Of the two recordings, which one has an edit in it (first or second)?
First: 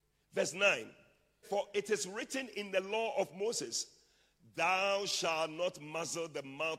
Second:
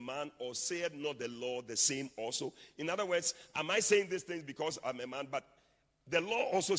first